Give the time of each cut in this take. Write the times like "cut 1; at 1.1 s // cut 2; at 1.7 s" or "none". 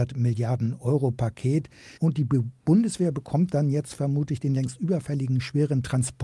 cut 1; at 2.0 s